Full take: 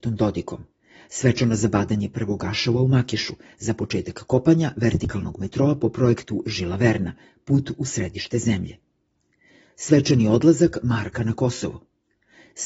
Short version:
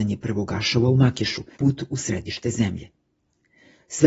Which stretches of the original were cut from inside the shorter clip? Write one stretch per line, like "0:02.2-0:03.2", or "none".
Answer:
0:03.5-0:07.4